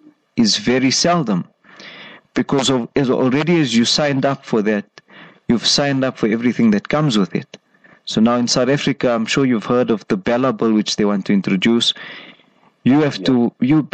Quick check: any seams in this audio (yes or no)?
no